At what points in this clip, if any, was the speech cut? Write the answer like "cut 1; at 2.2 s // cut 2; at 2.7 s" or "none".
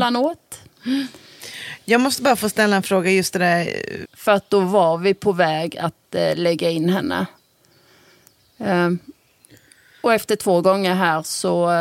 cut 1; at 4.0 s